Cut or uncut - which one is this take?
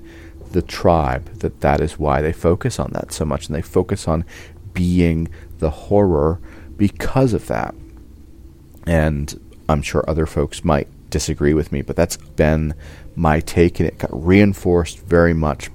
cut